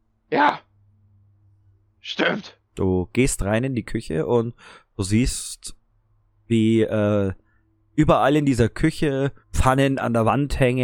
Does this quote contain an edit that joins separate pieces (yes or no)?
yes